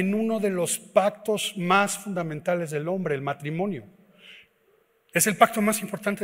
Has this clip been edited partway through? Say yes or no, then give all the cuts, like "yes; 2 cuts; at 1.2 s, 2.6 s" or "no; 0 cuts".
no; 0 cuts